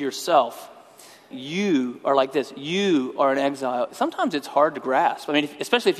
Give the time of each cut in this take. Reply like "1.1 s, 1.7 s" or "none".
1.3 s